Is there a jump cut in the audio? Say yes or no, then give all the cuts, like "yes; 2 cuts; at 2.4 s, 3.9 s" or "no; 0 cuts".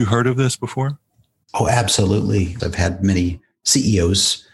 yes; 1 cut; at 2.6 s